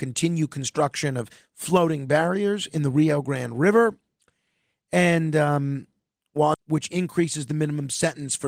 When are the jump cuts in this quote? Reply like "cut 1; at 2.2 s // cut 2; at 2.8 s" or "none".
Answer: cut 1; at 6.5 s